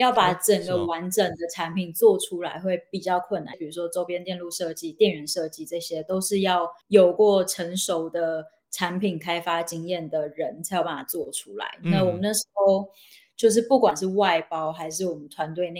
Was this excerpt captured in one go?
no; 2 cuts; at 3.5 s, 6.8 s

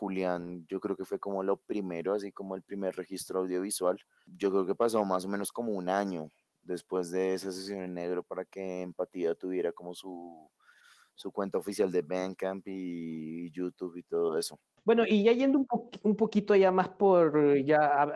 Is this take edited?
no; 0 cuts

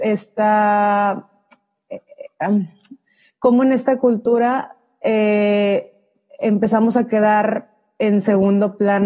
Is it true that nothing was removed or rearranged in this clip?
yes; 0 cuts

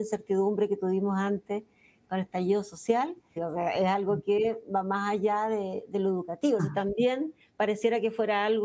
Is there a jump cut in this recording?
yes; 2 cuts; at 3.4 s, 6.6 s

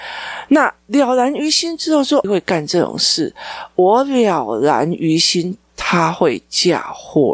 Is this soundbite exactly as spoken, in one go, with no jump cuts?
no; 1 cut; at 2.2 s

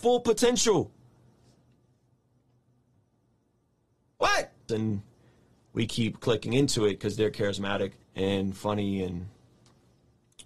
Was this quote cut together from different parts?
yes; 2 cuts; at 4.7 s, 8.0 s

